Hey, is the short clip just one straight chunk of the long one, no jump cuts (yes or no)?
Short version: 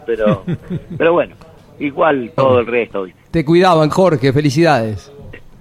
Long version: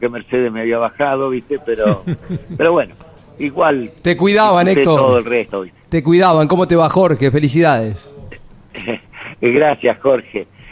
no